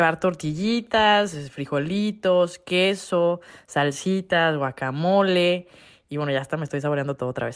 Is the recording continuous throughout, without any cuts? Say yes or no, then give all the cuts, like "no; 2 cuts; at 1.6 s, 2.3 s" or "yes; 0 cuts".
yes; 0 cuts